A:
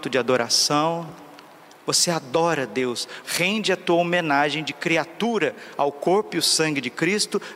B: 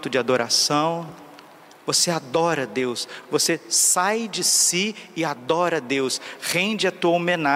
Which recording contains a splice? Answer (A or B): A